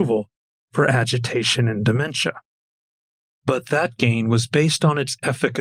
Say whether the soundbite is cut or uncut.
uncut